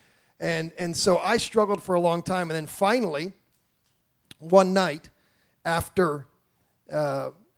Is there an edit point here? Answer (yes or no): no